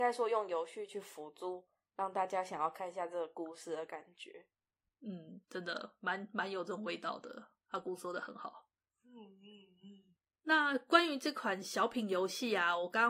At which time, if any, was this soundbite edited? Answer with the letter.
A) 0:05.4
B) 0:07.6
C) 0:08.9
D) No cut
A